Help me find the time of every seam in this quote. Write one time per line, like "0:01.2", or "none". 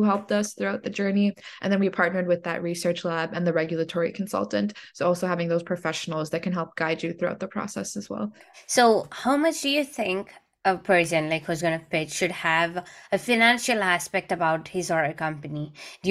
none